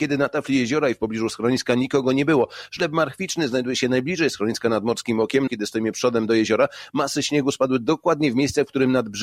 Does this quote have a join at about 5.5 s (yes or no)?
yes